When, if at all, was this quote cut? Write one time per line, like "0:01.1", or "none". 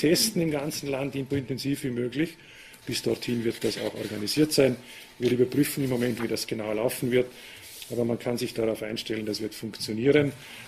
0:01.3
0:02.8
0:06.2